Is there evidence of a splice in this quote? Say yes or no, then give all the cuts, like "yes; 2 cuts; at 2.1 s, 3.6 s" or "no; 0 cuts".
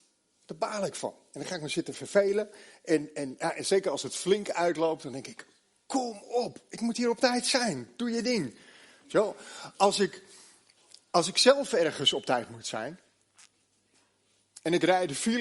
no; 0 cuts